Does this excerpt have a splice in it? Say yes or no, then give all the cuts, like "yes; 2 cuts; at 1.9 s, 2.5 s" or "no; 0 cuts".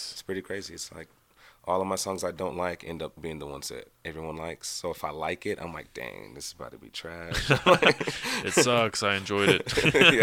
no; 0 cuts